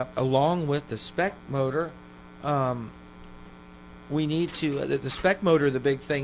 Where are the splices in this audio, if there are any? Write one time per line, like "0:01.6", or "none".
none